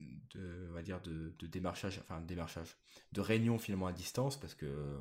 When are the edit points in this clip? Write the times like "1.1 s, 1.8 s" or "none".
none